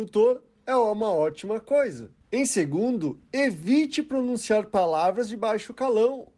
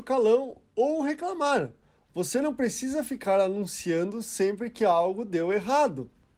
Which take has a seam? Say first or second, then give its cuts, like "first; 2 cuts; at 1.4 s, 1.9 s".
first; 1 cut; at 2.2 s